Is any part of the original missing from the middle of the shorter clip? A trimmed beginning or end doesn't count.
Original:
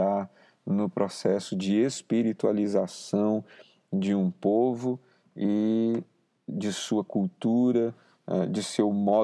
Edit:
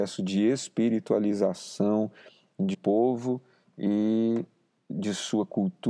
yes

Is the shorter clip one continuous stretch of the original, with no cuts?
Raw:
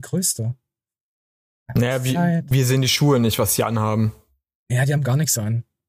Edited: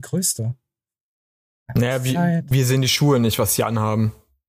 yes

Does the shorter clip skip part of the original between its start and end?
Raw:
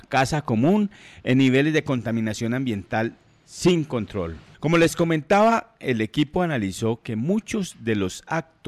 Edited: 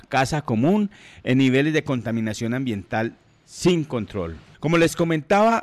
no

